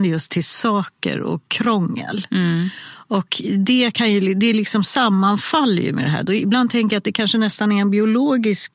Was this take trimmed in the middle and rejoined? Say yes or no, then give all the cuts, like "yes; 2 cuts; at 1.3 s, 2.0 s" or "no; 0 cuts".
no; 0 cuts